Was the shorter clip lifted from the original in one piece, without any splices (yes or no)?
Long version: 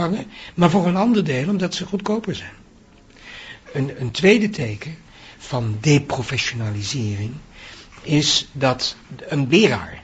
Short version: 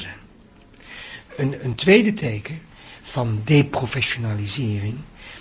yes